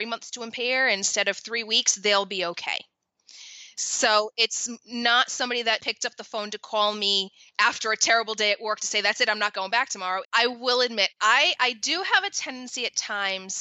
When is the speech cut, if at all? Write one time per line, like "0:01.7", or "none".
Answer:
0:05.8
0:10.2